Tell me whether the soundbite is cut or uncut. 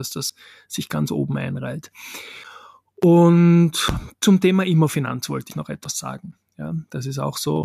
uncut